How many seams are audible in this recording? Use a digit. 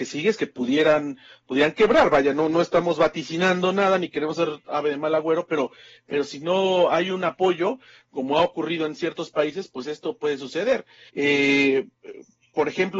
1